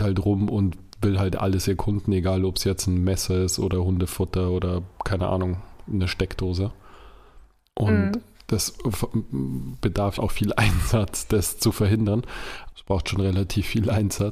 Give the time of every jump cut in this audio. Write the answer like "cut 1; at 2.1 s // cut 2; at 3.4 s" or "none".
cut 1; at 10.2 s // cut 2; at 12.7 s